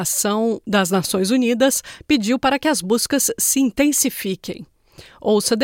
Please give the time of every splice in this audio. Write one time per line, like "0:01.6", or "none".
0:02.0